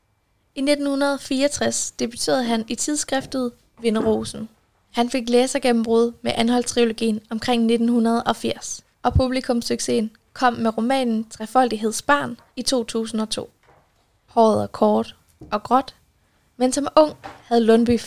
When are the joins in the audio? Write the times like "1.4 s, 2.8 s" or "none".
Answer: 8.9 s, 14.3 s